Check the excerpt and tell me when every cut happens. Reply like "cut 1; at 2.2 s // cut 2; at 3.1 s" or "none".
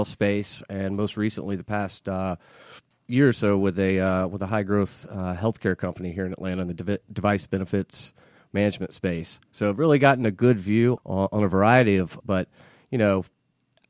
cut 1; at 11.0 s // cut 2; at 12.2 s

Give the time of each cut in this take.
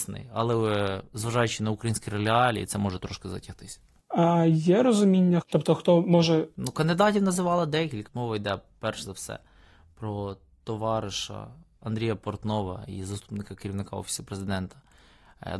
cut 1; at 5.4 s // cut 2; at 8.1 s

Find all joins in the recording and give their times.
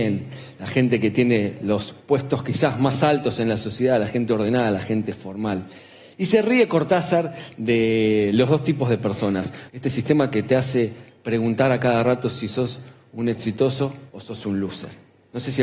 cut 1; at 9.7 s // cut 2; at 14.1 s

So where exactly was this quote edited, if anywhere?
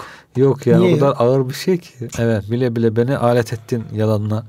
cut 1; at 2.1 s

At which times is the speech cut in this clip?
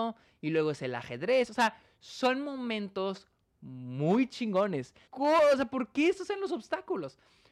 cut 1; at 5.1 s

